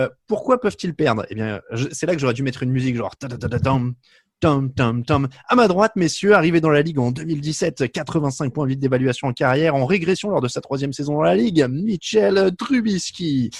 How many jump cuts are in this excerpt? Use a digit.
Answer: 0